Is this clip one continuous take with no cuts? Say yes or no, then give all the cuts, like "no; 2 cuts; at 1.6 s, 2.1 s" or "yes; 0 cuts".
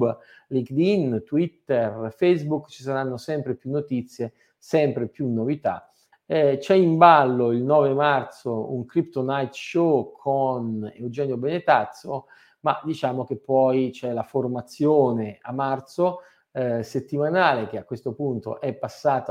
no; 2 cuts; at 6.1 s, 16.4 s